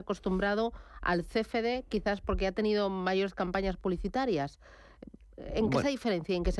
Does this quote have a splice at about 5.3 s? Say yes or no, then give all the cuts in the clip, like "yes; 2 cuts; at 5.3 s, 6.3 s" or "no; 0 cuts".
no; 0 cuts